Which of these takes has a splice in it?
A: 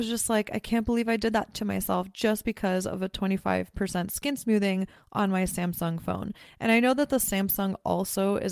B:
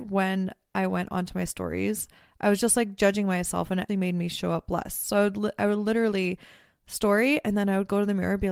B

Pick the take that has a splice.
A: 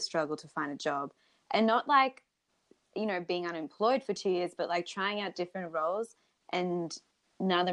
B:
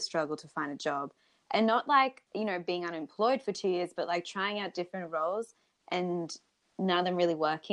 B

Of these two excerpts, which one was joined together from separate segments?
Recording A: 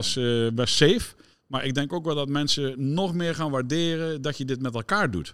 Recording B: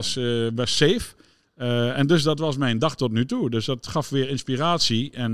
A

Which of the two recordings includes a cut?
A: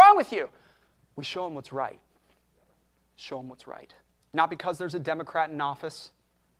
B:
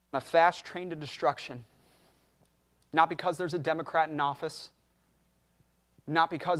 A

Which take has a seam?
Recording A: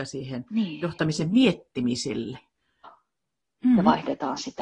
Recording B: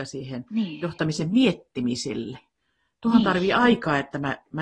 A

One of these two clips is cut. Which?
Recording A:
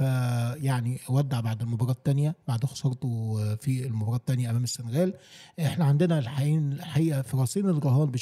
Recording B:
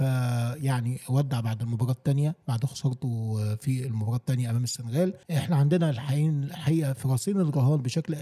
B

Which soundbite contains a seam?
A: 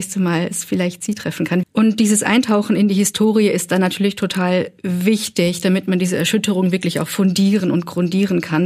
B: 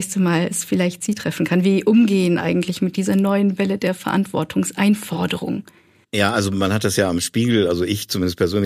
A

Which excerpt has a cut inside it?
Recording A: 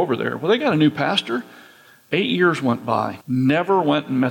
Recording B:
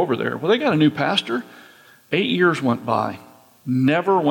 A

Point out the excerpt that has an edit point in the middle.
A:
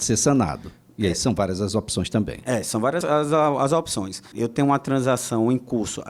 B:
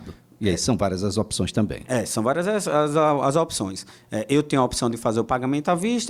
A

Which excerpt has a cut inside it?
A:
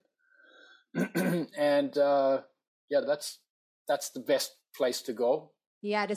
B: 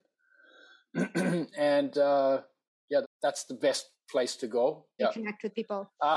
B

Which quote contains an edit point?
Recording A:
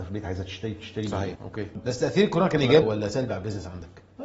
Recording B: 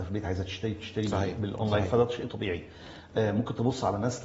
A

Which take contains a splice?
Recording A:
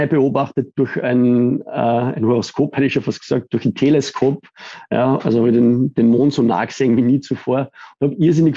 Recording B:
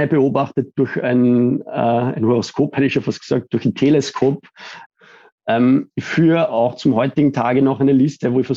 B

